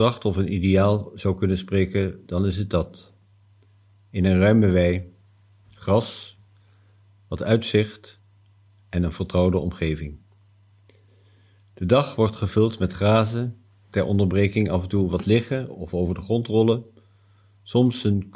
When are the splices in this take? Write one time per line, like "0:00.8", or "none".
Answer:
none